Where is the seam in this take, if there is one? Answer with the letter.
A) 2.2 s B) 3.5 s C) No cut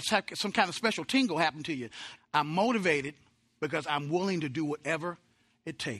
A